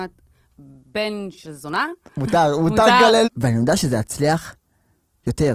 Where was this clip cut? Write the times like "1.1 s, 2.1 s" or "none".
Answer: 3.2 s